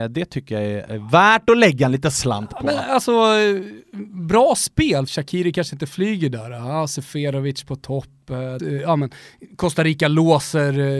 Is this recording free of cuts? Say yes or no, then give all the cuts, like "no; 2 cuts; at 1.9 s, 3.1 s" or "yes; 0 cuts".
no; 2 cuts; at 5.1 s, 8.6 s